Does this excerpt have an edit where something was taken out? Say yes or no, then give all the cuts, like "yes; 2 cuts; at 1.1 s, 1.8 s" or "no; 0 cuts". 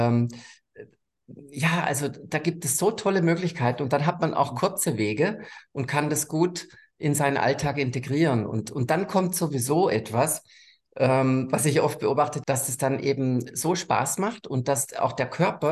yes; 1 cut; at 12.4 s